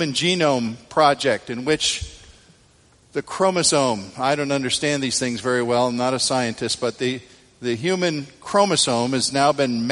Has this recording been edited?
no; 0 cuts

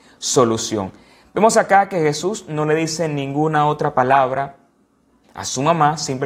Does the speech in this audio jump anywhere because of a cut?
yes; 1 cut; at 5.2 s

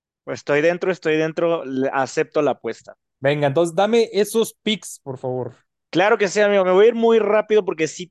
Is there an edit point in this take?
no; 0 cuts

